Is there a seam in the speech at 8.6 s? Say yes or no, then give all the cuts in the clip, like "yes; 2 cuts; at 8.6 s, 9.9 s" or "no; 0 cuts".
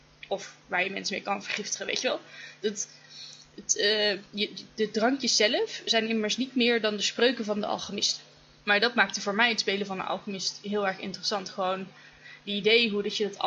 yes; 1 cut; at 8.6 s